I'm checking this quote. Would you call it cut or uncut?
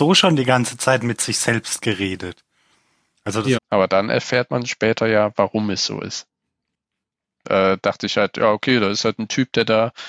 cut